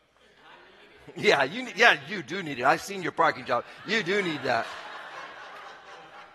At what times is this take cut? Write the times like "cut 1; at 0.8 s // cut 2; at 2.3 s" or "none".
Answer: none